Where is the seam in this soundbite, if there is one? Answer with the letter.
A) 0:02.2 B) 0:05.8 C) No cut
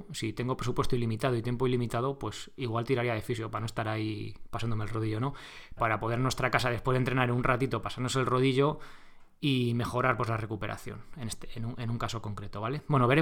B